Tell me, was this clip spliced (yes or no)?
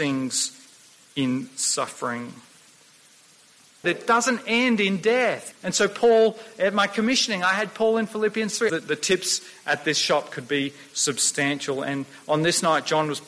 yes